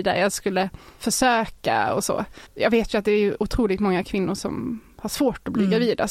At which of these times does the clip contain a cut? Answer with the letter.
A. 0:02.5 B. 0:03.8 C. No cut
A